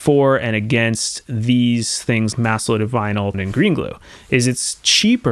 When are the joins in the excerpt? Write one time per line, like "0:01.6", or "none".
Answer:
0:02.3
0:03.3